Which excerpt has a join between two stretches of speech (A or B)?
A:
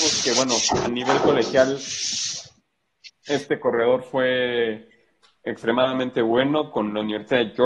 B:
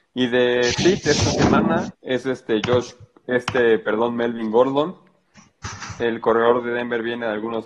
B